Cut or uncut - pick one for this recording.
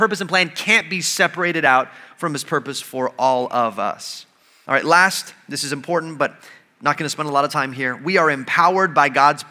uncut